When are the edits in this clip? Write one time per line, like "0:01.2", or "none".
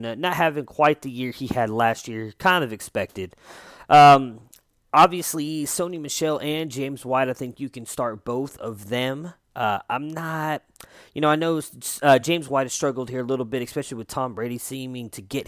none